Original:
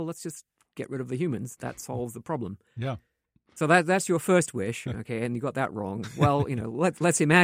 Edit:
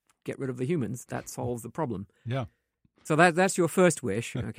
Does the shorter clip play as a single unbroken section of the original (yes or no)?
yes